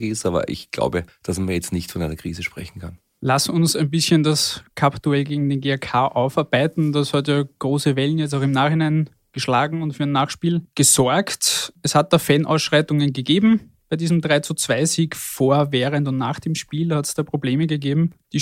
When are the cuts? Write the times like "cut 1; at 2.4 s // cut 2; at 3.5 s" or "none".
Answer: none